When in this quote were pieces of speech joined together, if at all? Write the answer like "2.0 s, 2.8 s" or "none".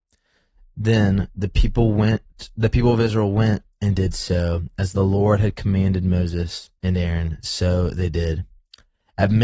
6.8 s